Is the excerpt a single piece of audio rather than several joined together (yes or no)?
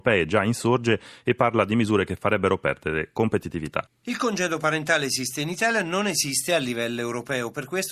no